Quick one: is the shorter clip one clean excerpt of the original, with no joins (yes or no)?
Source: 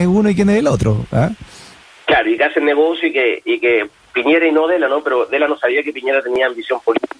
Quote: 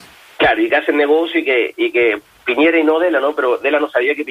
yes